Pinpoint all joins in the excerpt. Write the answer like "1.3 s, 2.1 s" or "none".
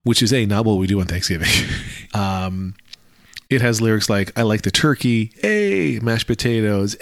2.1 s